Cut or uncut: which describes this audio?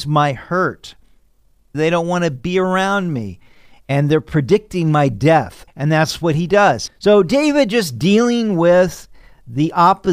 cut